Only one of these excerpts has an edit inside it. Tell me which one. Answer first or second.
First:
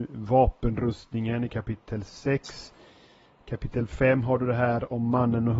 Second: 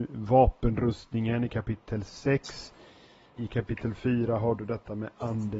second